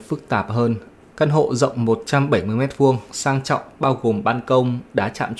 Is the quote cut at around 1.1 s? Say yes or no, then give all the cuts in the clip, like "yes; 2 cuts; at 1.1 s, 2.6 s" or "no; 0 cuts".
yes; 1 cut; at 1.1 s